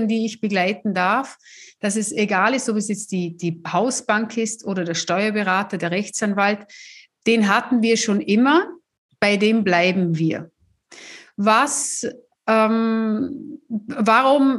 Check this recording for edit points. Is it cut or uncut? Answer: uncut